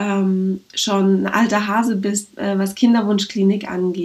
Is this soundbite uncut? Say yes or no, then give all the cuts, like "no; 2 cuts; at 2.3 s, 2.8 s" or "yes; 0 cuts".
yes; 0 cuts